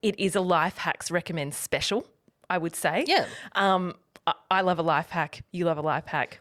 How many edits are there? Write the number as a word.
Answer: zero